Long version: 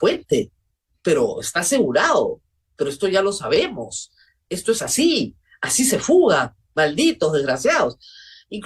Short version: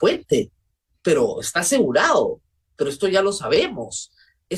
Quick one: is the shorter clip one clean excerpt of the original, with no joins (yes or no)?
yes